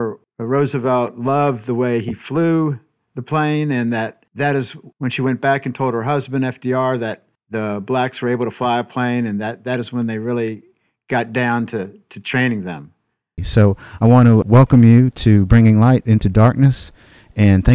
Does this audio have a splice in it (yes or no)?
yes